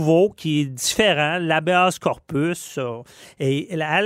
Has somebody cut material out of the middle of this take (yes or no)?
no